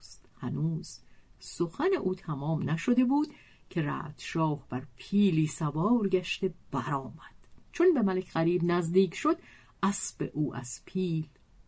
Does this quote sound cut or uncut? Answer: cut